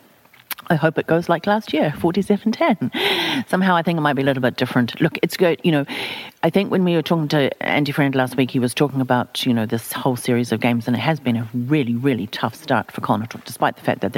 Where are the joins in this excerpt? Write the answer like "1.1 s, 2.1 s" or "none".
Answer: none